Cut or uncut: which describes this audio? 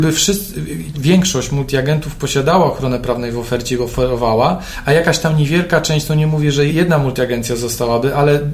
cut